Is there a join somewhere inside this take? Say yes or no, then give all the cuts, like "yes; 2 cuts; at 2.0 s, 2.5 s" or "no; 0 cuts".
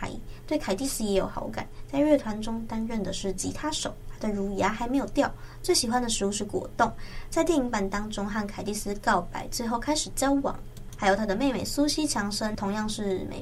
no; 0 cuts